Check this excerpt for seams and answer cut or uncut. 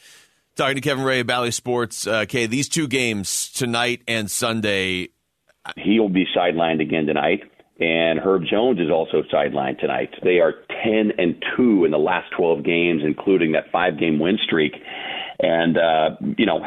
cut